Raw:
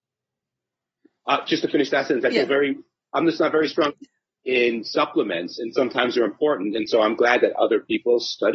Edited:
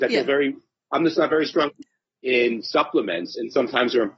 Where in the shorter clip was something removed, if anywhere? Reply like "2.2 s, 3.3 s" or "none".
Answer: none